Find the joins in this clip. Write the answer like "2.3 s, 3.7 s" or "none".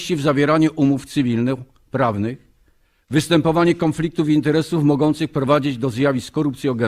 none